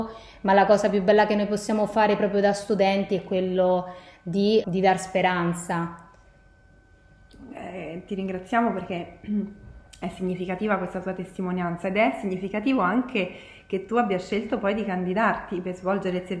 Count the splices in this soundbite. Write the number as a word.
one